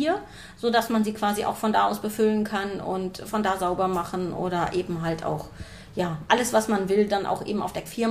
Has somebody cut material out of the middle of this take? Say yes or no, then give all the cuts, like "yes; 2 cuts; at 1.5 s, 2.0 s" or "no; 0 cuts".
no; 0 cuts